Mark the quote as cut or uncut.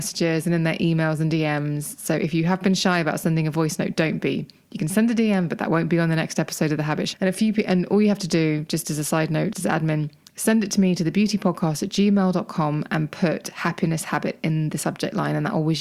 cut